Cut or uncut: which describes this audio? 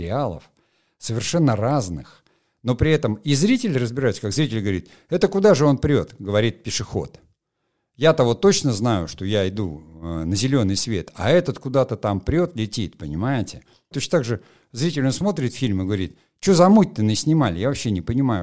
cut